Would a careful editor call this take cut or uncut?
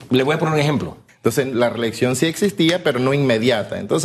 cut